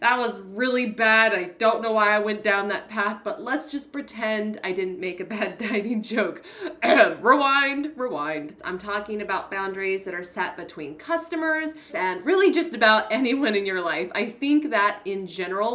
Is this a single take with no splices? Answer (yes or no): no